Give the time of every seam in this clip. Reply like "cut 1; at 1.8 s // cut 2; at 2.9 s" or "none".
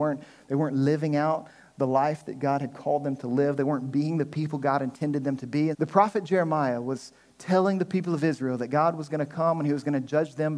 cut 1; at 5.7 s